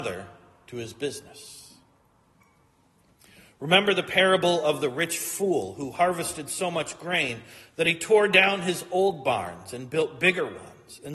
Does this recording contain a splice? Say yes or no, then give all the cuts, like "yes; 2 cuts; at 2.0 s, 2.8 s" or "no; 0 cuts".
no; 0 cuts